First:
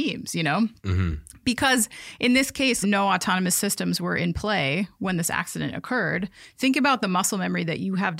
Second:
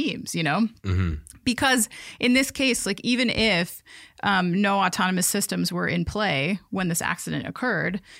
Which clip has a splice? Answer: first; 1 cut; at 2.8 s

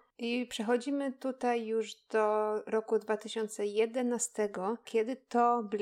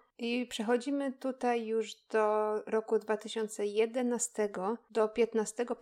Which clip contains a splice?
first; 1 cut; at 4.8 s

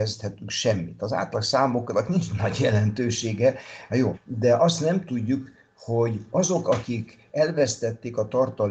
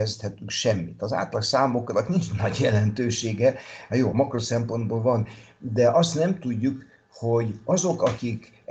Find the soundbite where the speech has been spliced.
first; 1 cut; at 4.1 s

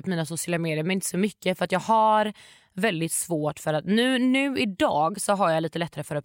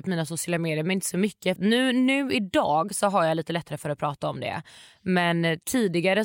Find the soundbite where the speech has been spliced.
second; 1 cut; at 1.6 s

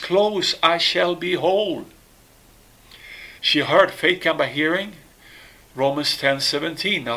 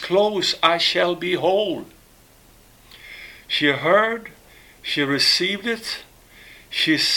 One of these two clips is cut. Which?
first; 1 cut; at 3.4 s

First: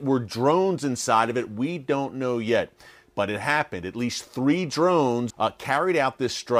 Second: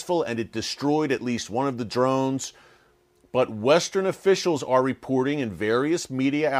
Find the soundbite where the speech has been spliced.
first; 1 cut; at 5.3 s

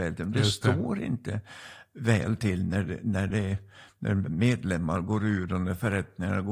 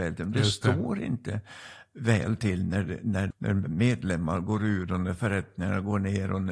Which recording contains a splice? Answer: second; 1 cut; at 3.3 s

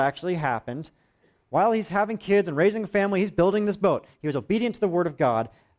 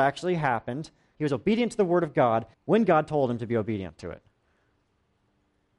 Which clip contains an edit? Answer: second; 2 cuts; at 1.1 s, 2.5 s

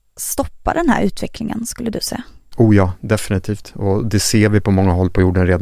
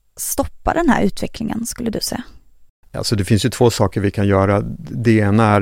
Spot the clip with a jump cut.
first; 1 cut; at 2.5 s

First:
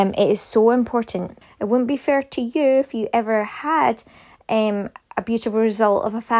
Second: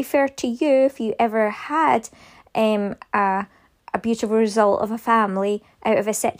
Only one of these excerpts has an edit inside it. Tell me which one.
first; 2 cuts; at 1.4 s, 5.0 s

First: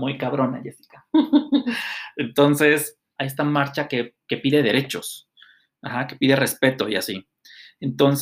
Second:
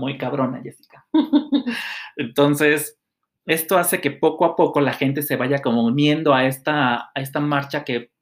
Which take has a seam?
first; 1 cut; at 3.2 s

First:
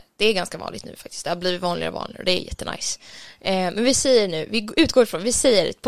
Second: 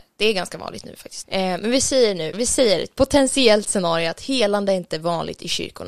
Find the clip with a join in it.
second; 2 cuts; at 1.2 s, 2.3 s

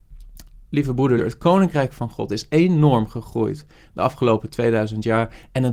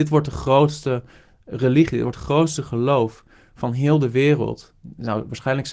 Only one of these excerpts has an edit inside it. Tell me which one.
first; 1 cut; at 1.2 s

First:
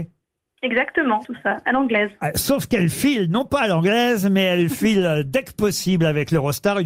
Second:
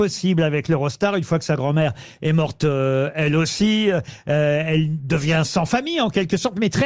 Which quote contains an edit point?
first; 1 cut; at 1.2 s

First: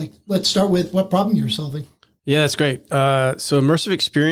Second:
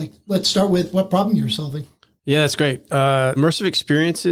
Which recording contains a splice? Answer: second; 1 cut; at 3.4 s

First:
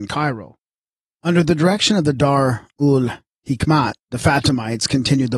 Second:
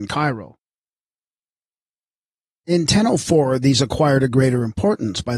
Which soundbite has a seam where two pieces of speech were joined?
first; 2 cuts; at 1.1 s, 4.0 s

